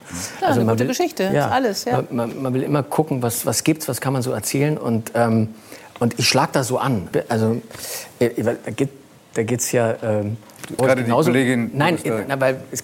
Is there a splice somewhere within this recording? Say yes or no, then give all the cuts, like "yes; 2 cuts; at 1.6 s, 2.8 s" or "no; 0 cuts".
yes; 2 cuts; at 7.1 s, 10.8 s